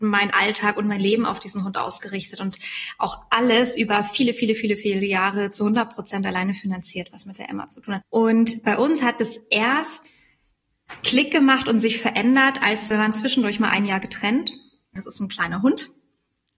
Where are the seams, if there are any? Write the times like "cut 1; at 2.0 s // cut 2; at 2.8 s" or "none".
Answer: cut 1; at 8.0 s // cut 2; at 12.9 s // cut 3; at 15.0 s